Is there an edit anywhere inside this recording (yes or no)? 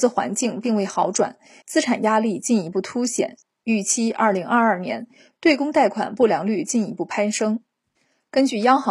yes